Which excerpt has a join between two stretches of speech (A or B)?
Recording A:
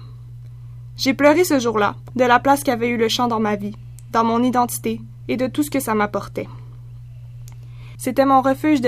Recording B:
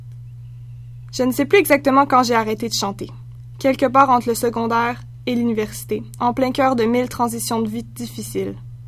A